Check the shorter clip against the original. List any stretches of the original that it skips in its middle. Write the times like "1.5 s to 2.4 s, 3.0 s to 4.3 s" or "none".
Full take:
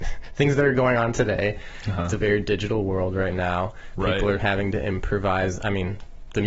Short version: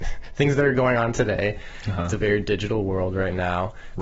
none